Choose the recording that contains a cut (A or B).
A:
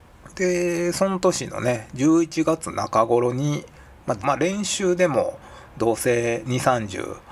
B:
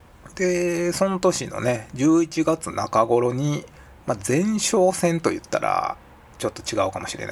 A